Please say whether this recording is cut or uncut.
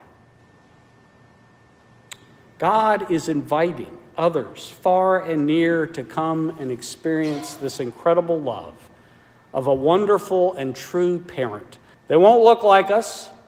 cut